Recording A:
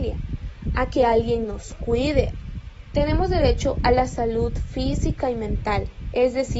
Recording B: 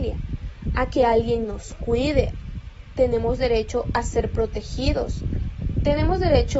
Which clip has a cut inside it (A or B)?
A